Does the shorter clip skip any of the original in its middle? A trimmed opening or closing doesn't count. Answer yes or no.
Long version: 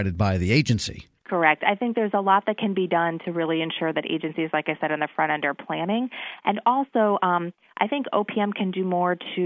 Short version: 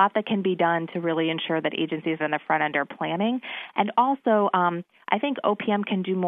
yes